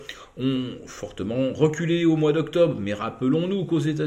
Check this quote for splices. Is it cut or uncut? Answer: uncut